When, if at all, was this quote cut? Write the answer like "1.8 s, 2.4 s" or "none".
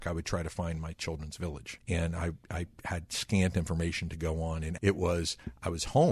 1.8 s, 4.8 s

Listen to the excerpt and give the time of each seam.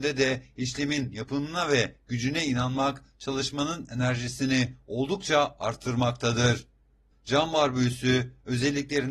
7.1 s

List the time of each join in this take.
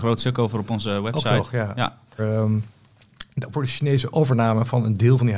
2.2 s, 3.5 s

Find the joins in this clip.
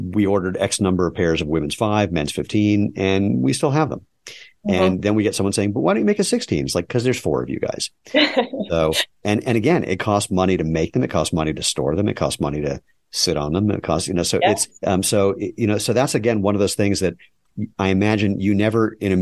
14.7 s

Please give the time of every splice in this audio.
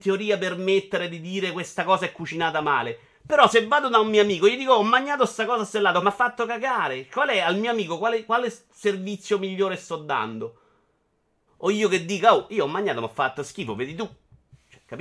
6.0 s, 11.5 s

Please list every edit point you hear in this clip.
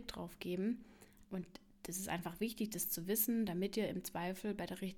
1.2 s

